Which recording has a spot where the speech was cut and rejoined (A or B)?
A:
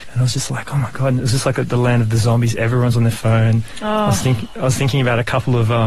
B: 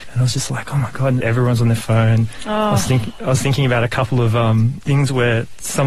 B